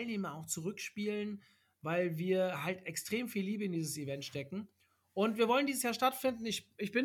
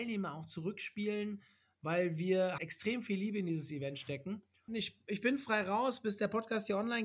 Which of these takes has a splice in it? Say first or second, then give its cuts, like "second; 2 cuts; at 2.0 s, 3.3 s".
second; 2 cuts; at 2.6 s, 4.7 s